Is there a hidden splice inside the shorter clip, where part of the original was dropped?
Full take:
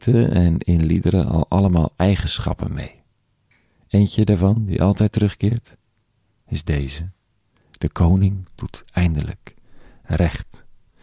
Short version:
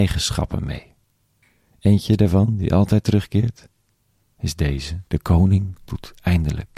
yes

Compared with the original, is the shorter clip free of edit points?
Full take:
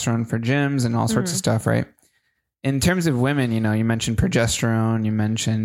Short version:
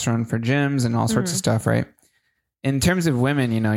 yes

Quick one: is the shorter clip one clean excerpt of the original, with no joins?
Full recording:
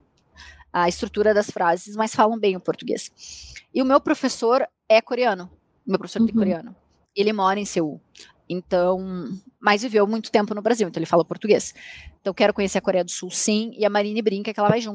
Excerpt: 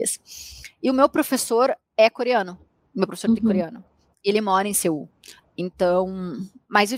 yes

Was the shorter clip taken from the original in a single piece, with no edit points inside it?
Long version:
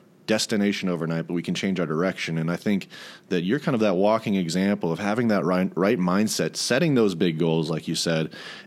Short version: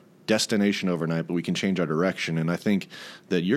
yes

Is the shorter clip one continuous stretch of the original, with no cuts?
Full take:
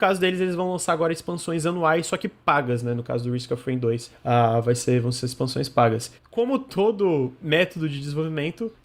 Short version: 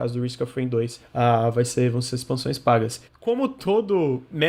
yes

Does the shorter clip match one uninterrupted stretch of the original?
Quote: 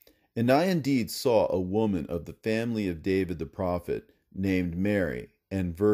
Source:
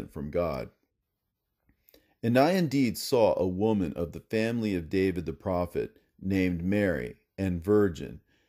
yes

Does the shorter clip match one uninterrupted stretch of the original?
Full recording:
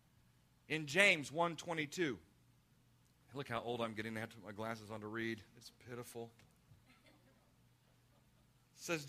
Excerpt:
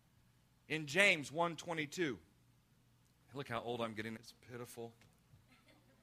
no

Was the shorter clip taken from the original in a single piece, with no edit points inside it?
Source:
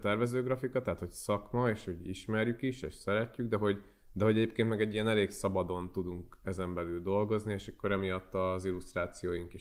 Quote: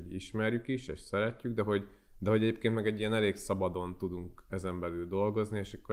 yes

